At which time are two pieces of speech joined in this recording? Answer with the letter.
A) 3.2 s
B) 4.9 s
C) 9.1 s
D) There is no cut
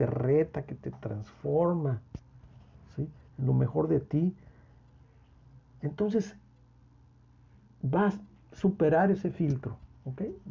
D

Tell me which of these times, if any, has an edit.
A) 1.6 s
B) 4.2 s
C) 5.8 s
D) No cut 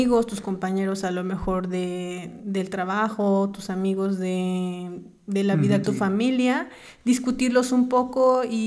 C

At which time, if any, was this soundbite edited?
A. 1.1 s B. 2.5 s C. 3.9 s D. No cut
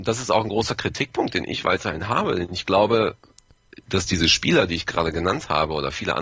C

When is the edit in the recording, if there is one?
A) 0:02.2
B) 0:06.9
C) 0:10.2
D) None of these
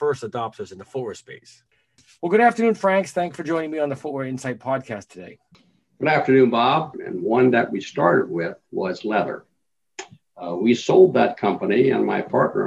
B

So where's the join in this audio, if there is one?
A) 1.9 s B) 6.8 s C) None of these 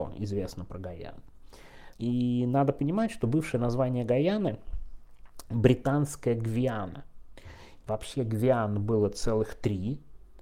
A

